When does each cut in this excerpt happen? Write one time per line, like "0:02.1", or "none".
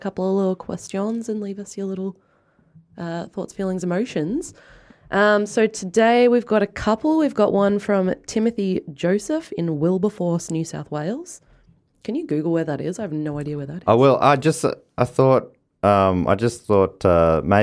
none

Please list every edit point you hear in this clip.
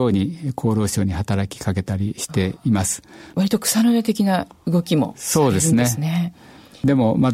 0:03.3

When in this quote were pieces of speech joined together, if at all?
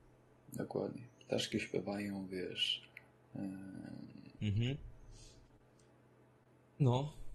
0:04.4

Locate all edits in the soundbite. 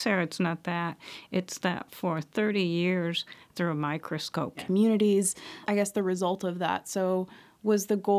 0:03.5
0:04.5
0:05.7

